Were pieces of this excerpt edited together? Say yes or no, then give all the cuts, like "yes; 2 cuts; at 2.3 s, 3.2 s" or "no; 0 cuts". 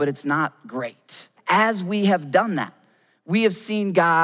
yes; 1 cut; at 1.4 s